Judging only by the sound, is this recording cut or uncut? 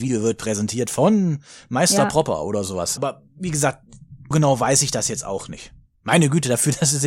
cut